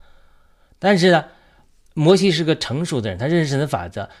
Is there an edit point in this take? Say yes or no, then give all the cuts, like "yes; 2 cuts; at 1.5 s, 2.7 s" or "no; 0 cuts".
no; 0 cuts